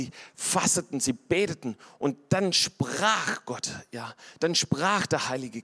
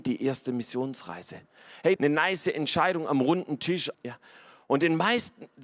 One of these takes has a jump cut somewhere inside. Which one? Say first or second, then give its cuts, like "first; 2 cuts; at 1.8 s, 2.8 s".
second; 2 cuts; at 2.0 s, 3.9 s